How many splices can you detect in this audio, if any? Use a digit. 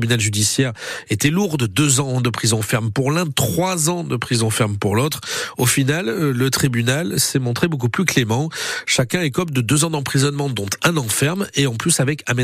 0